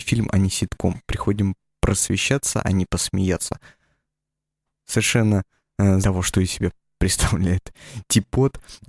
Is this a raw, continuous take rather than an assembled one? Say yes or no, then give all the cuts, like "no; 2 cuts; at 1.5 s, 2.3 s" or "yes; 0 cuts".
no; 1 cut; at 6.0 s